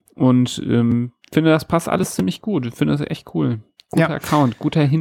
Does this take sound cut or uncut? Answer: uncut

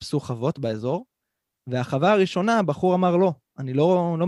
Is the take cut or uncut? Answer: uncut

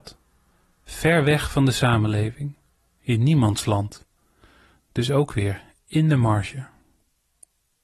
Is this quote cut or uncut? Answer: cut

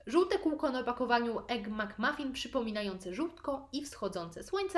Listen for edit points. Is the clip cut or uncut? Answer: uncut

